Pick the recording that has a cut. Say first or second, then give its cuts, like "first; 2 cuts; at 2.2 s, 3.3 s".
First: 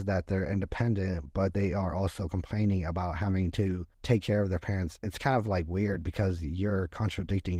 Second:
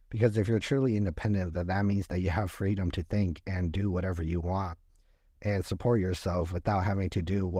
first; 2 cuts; at 3.9 s, 5.0 s